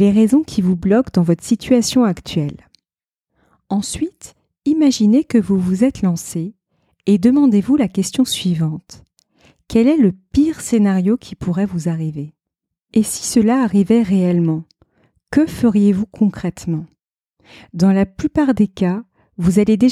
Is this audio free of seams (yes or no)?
yes